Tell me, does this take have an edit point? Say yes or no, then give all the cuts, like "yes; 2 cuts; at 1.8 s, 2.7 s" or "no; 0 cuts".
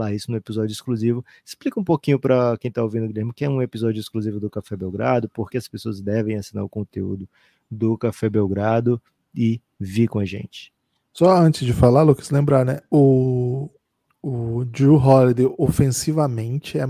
yes; 1 cut; at 5.5 s